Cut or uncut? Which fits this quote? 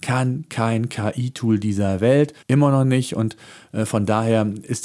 cut